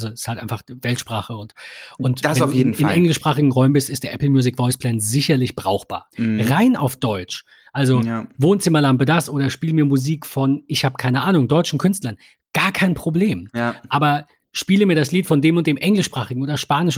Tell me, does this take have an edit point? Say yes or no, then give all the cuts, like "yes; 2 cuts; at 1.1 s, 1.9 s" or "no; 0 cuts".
yes; 1 cut; at 6.1 s